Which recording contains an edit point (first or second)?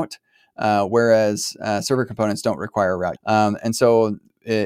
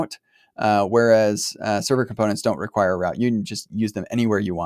first